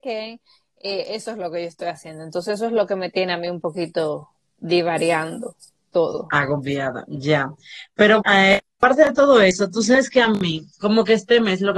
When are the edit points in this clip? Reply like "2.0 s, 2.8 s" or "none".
8.2 s